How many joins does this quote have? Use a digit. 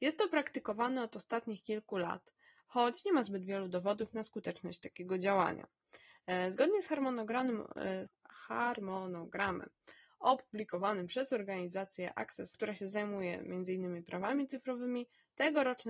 2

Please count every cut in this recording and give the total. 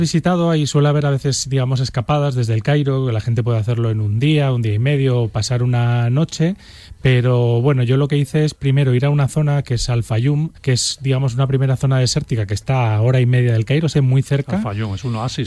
2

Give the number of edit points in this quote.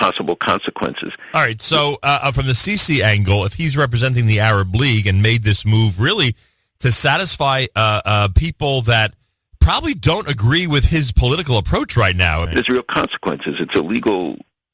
1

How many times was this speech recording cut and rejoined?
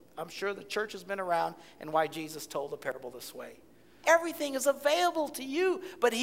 1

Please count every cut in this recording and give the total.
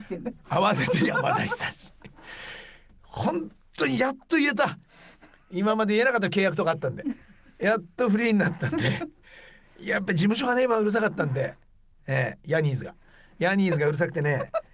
0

